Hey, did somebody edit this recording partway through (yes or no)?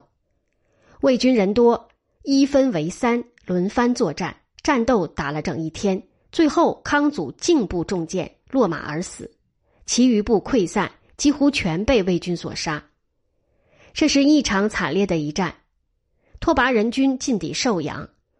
yes